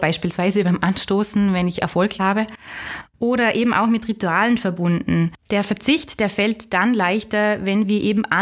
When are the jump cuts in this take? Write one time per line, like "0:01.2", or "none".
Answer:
none